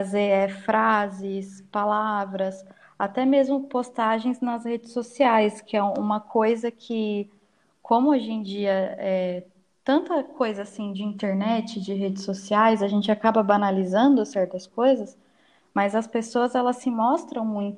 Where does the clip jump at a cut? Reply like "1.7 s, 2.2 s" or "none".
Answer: none